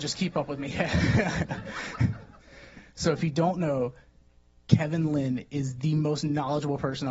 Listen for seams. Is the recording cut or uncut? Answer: uncut